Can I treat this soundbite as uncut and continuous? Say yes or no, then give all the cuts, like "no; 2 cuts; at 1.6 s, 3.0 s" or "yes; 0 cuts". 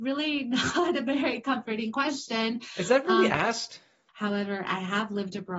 no; 1 cut; at 4.1 s